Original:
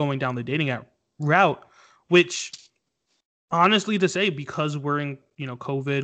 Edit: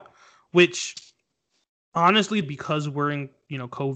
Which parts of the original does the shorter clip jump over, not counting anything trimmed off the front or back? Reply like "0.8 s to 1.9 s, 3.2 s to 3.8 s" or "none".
4.0 s to 4.3 s